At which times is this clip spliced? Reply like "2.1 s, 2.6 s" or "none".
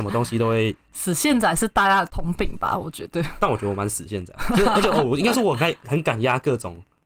5.8 s

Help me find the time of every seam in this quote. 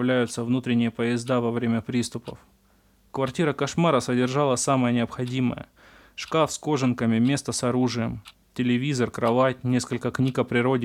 none

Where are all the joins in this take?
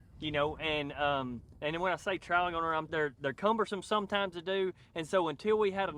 2.9 s

